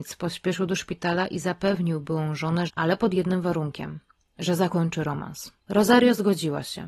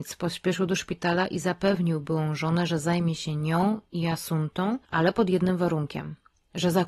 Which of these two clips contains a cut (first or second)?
first